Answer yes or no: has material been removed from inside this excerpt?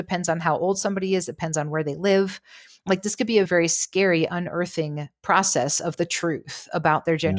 yes